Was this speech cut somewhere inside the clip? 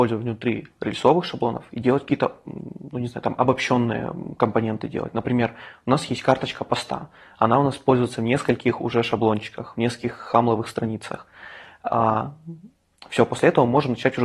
no; 0 cuts

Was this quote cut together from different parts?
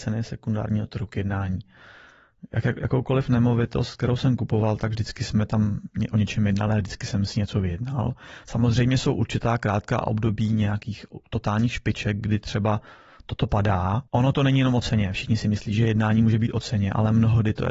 yes; 1 cut; at 14.1 s

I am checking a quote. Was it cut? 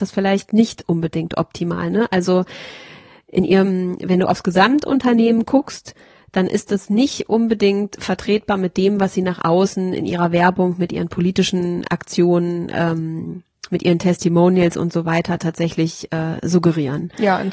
no; 0 cuts

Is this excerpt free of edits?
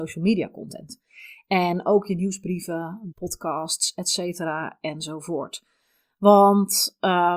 no; 1 cut; at 3.1 s

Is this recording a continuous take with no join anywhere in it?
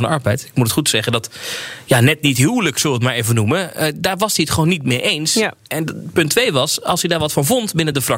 yes; 0 cuts

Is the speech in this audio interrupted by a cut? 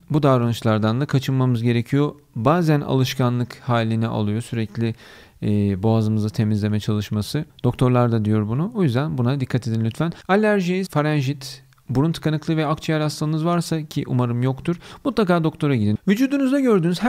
yes; 1 cut; at 10.9 s

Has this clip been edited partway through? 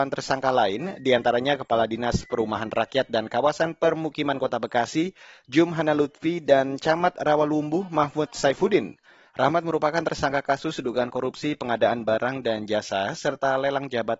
yes; 1 cut; at 9.3 s

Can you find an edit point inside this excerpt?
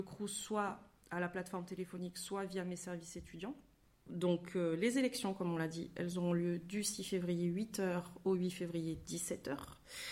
no; 0 cuts

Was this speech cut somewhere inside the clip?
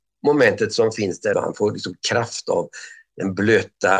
yes; 1 cut; at 1.3 s

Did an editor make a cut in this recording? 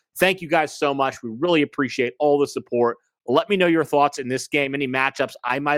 no; 0 cuts

